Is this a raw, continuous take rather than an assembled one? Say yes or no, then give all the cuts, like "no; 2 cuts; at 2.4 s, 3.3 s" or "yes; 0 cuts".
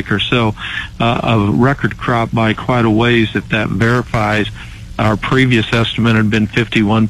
yes; 0 cuts